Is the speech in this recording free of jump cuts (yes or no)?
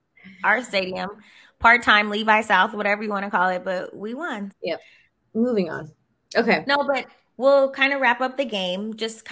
no